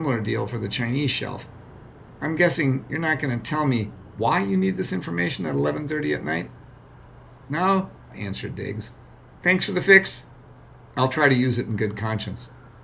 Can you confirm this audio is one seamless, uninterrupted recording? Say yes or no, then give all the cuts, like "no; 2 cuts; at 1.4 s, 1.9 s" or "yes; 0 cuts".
no; 1 cut; at 8.1 s